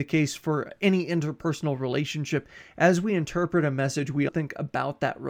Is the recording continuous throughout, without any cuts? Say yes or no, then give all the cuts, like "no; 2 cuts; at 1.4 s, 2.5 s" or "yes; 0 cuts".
no; 1 cut; at 4.3 s